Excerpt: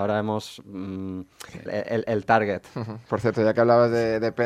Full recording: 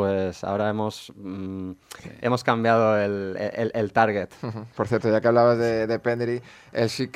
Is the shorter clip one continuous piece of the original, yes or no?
no